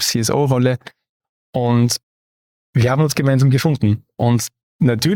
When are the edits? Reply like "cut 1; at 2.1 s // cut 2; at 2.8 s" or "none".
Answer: none